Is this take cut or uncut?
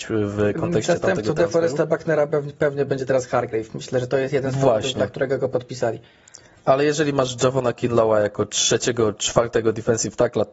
uncut